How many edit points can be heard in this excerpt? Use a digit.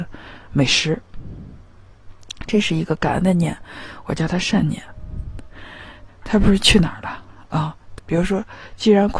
2